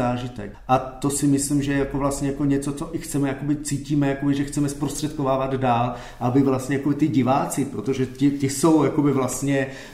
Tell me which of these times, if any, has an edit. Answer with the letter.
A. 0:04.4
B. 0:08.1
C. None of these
C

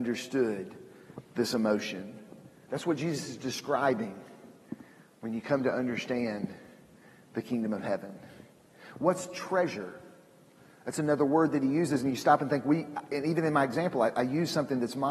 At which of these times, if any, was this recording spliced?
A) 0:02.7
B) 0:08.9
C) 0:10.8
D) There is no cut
A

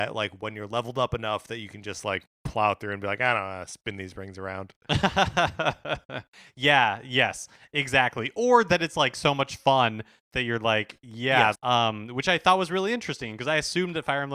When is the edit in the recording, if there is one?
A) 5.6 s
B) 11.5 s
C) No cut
B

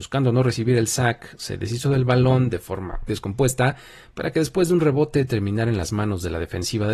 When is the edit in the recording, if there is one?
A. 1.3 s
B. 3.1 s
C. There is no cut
B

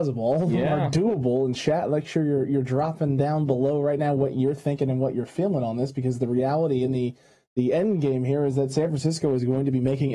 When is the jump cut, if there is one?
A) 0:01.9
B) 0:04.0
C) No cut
C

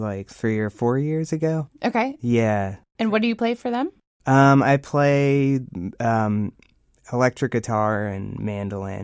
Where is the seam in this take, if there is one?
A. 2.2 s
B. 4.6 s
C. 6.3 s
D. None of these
D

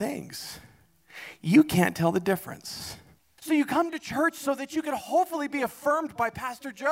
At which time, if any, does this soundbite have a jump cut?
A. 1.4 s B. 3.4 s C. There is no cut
B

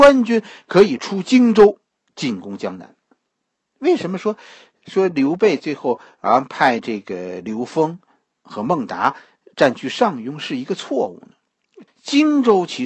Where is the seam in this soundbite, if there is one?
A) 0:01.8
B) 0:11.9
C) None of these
B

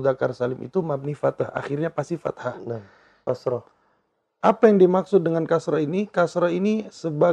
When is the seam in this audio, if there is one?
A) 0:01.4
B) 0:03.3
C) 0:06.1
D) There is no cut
B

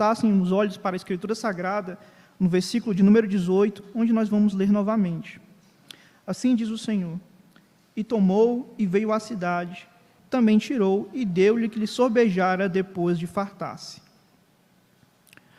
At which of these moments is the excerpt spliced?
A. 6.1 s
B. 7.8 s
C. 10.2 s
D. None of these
C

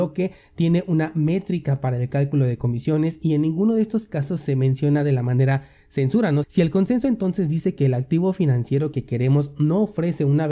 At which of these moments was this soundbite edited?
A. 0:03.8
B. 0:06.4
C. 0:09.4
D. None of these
B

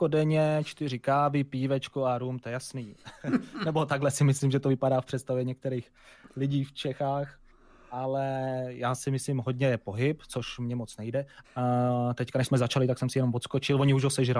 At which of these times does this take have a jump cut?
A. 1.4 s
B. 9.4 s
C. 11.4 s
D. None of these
C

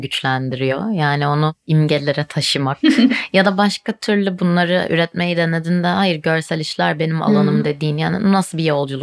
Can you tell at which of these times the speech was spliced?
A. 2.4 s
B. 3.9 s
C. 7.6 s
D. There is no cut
D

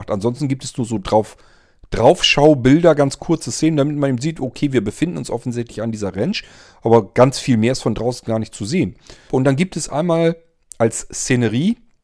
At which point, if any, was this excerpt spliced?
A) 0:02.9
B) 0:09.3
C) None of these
B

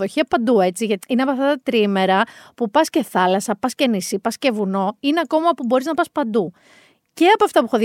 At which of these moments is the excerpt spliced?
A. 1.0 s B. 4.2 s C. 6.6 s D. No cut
A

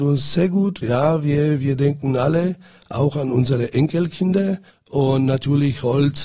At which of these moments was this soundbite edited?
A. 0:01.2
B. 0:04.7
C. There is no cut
B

